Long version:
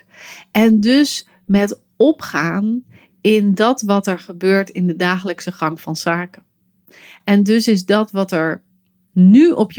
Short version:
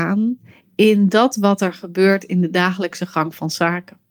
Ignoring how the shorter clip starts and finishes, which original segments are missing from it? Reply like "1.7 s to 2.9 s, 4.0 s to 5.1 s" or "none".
none